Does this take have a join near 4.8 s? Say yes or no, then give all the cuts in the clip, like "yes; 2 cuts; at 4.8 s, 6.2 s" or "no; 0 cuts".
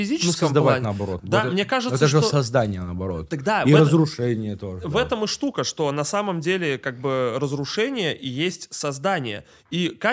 no; 1 cut; at 1.2 s